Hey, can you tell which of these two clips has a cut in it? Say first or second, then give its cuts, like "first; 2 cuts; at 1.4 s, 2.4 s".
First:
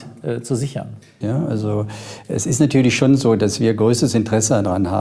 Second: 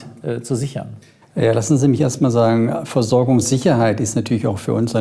first; 1 cut; at 1.2 s